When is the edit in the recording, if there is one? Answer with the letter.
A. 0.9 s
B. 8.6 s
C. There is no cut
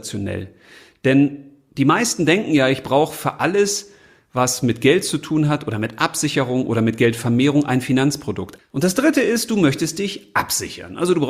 B